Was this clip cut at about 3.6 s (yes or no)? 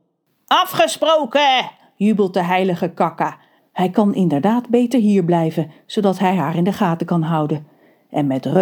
yes